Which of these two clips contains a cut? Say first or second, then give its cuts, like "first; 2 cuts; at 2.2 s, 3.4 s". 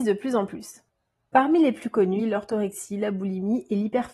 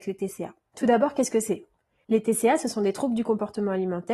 first; 1 cut; at 2.2 s